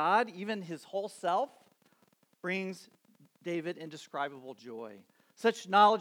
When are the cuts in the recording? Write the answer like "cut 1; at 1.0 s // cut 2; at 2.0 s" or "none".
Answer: none